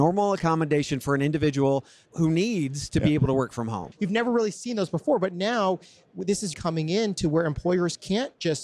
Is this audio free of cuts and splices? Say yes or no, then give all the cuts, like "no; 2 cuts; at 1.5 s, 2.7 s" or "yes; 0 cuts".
no; 2 cuts; at 3.9 s, 6.5 s